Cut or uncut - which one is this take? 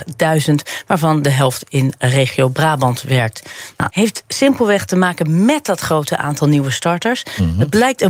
cut